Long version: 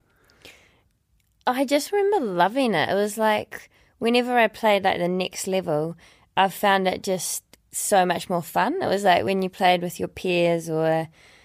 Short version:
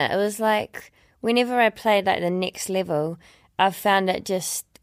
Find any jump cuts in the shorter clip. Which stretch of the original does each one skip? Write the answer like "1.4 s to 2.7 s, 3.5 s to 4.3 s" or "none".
none